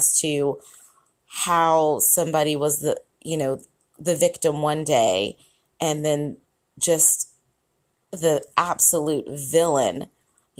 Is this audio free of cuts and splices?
yes; 0 cuts

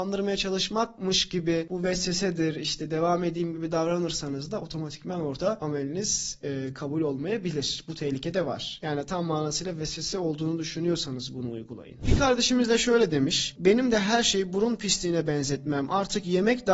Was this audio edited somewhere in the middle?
no; 0 cuts

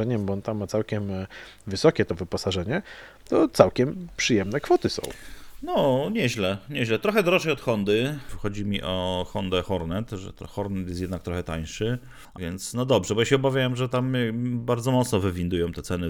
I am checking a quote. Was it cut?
yes; 1 cut; at 12.4 s

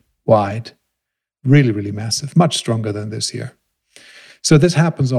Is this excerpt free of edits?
yes; 0 cuts

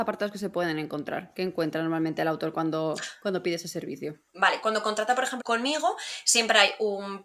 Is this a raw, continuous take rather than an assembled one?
no; 2 cuts; at 4.3 s, 5.4 s

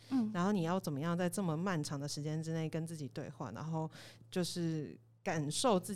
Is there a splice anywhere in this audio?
no; 0 cuts

